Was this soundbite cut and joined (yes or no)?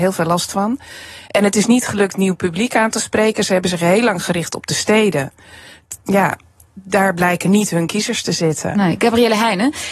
yes